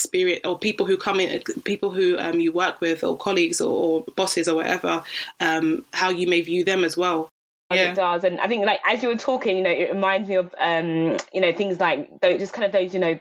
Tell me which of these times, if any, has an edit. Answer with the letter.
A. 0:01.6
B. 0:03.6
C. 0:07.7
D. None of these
C